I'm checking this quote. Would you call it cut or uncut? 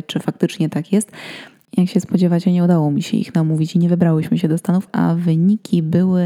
cut